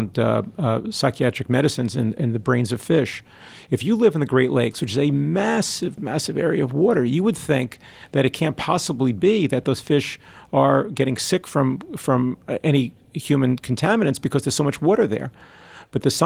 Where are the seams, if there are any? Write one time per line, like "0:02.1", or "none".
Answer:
0:06.0